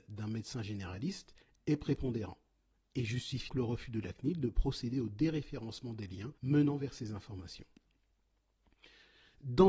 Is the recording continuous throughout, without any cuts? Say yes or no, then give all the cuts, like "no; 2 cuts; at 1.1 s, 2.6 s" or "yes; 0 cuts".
no; 2 cuts; at 3.5 s, 6.4 s